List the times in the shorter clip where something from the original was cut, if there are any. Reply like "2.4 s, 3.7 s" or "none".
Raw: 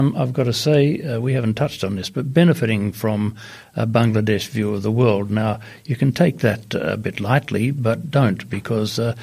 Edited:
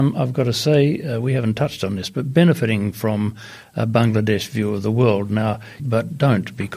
5.8 s

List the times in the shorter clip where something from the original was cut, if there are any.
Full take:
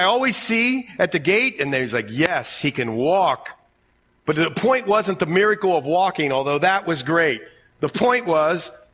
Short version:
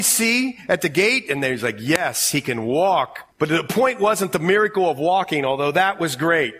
3.3 s

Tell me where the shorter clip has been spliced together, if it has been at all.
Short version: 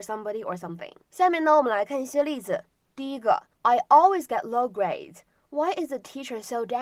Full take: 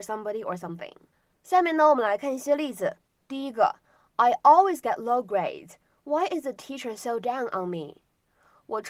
1.0 s, 3.5 s

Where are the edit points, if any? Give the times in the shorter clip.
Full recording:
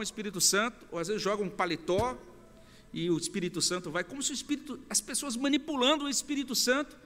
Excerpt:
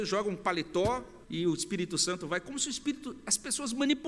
1.2 s

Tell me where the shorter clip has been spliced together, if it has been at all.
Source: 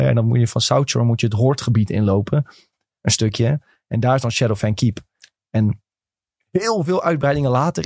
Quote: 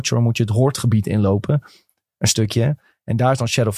none

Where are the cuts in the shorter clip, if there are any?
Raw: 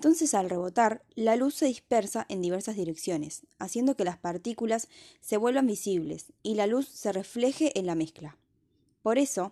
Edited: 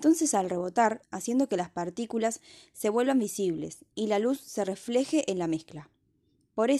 1.0 s

